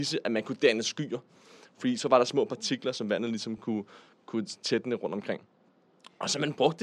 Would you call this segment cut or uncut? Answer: uncut